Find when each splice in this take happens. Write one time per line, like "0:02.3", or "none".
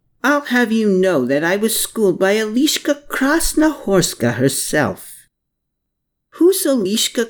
none

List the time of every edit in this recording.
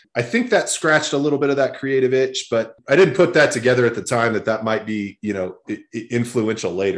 none

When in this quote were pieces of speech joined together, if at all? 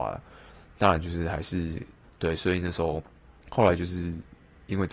0:02.0
0:03.4

